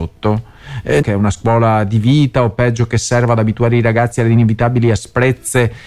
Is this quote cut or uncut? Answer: cut